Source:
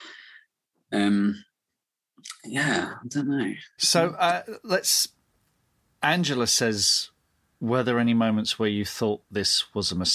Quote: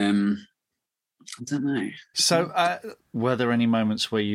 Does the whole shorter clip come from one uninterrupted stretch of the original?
no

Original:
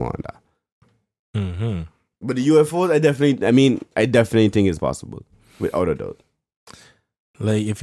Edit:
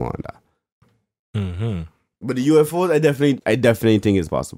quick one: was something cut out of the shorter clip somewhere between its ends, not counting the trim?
yes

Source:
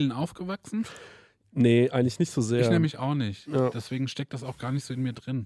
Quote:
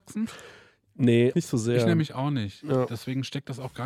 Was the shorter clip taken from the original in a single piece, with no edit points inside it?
no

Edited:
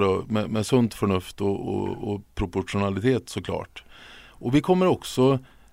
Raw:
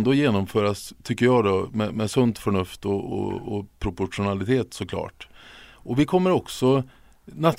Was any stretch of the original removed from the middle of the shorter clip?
no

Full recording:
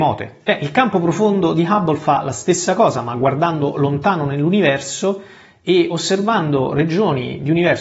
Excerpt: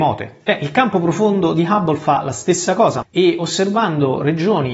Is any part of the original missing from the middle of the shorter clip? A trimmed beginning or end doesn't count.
yes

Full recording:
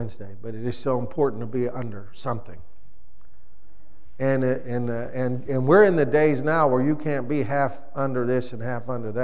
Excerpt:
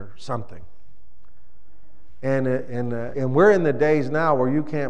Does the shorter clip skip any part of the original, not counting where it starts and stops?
yes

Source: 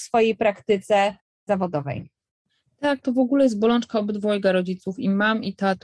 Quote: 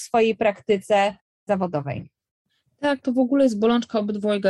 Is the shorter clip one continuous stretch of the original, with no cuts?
yes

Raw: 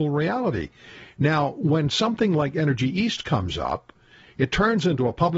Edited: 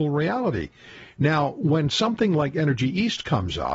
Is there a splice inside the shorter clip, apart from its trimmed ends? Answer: no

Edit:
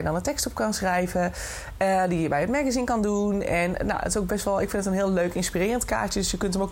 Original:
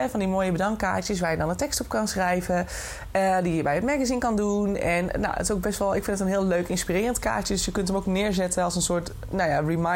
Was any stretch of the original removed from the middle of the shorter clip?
no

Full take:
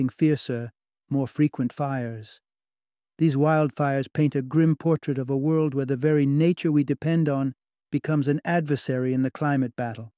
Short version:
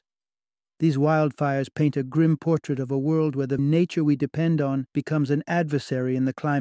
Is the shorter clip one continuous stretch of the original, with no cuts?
no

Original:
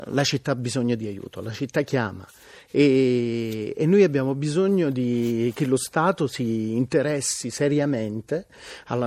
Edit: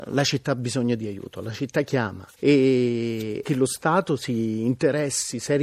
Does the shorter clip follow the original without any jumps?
no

